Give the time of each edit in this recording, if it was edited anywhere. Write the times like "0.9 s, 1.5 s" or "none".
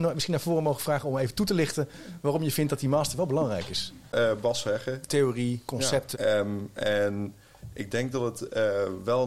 5.1 s, 6.1 s

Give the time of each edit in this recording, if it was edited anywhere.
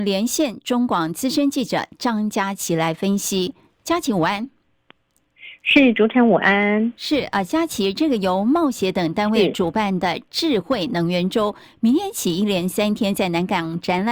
none

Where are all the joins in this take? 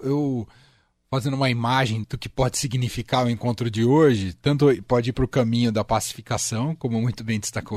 2.0 s

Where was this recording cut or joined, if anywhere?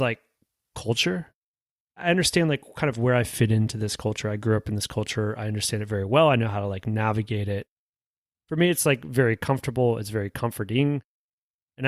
none

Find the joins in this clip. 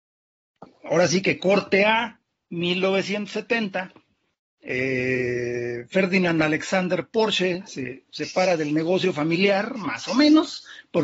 none

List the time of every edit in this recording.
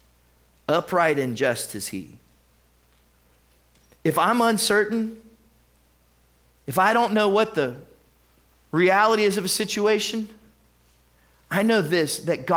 none

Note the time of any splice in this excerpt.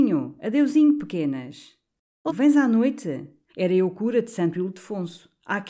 2.3 s, 3.5 s

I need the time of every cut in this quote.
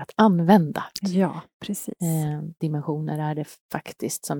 1.0 s, 2.6 s

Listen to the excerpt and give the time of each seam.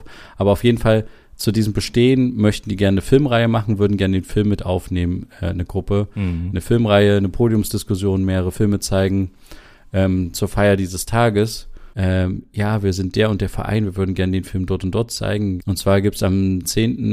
11.9 s, 15.6 s

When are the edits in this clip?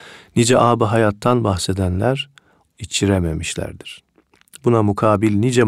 2.7 s

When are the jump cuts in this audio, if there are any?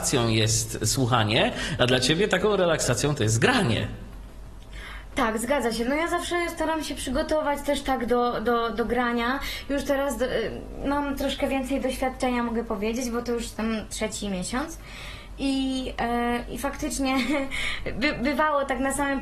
none

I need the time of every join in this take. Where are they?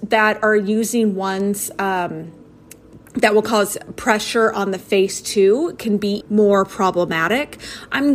3.1 s, 6.2 s

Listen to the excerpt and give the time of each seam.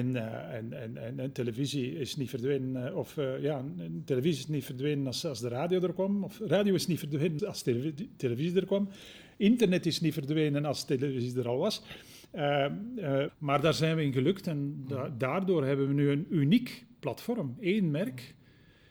7.4 s, 13.3 s

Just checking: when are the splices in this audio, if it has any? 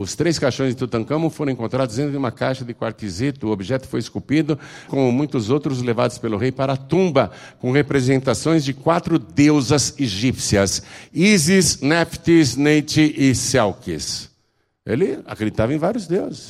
4.9 s

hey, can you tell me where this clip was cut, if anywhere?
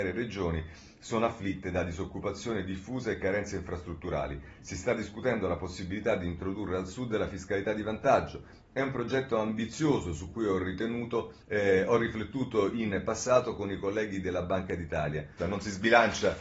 11.4 s, 15.4 s

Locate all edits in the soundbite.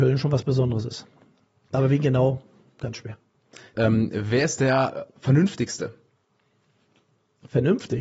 3.7 s

